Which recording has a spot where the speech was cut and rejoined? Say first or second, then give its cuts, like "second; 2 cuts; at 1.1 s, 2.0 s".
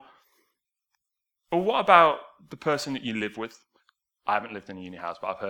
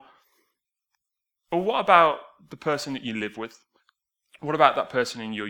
first; 1 cut; at 4.2 s